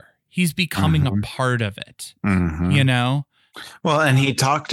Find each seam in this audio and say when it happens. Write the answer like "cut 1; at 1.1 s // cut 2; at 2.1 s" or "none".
none